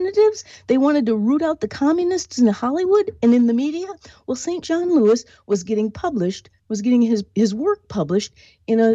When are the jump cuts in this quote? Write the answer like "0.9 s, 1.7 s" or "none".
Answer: 4.6 s, 6.6 s